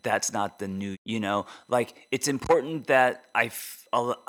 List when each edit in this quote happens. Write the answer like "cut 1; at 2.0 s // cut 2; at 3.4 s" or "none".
cut 1; at 0.9 s